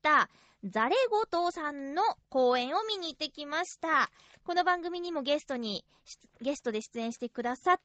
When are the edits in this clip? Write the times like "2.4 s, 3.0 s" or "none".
4.4 s